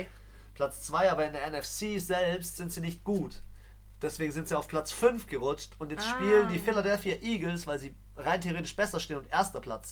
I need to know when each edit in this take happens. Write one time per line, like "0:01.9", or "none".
none

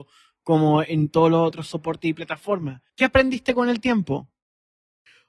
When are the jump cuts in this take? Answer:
0:02.9

